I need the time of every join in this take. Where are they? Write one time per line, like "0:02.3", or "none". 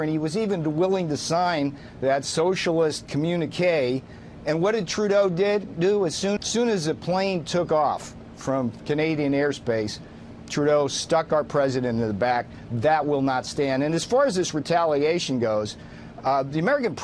0:06.4